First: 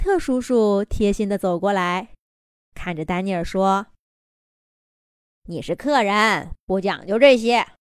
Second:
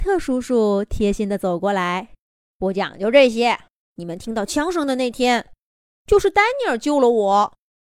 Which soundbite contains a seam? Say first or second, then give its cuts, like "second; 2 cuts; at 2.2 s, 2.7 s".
second; 2 cuts; at 2.5 s, 3.8 s